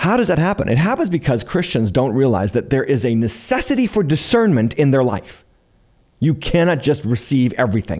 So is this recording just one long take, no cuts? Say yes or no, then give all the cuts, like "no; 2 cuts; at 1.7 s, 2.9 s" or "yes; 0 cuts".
yes; 0 cuts